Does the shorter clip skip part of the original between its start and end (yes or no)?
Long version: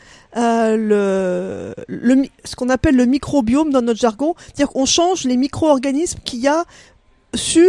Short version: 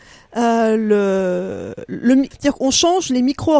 yes